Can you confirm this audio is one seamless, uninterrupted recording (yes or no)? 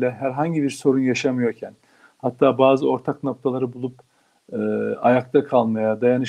yes